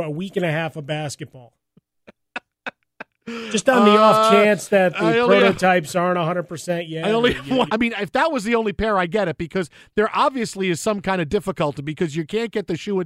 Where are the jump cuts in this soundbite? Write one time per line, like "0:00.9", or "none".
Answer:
0:07.7